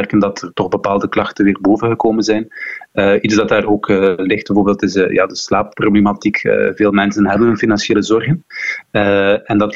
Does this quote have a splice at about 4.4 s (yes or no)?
no